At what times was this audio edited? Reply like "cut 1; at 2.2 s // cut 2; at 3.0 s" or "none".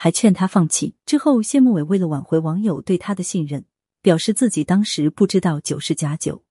cut 1; at 1.0 s // cut 2; at 3.9 s